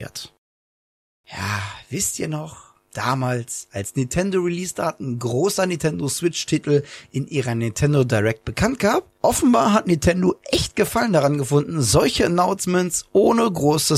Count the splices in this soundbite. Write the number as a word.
zero